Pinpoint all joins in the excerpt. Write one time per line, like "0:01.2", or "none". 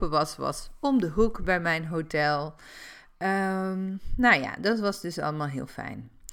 none